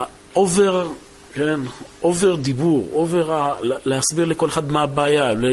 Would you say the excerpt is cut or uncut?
uncut